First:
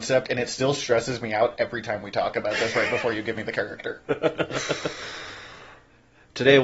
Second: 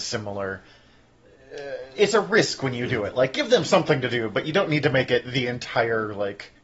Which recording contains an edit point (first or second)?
second